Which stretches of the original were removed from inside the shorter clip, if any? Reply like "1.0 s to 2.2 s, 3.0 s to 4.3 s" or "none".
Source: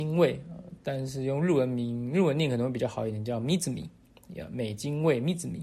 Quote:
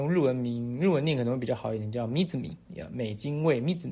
4.0 s to 4.3 s